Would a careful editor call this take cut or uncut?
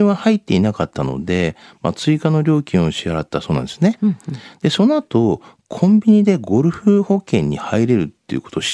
uncut